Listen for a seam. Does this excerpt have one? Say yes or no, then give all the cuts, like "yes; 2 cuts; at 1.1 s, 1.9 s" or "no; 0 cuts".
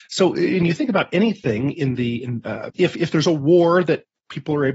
yes; 1 cut; at 2.7 s